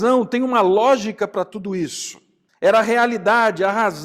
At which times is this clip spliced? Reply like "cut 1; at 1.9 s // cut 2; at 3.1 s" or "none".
cut 1; at 2.5 s